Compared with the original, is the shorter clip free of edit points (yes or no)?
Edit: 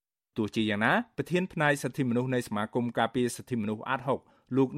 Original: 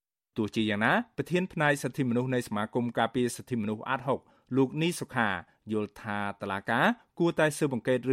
yes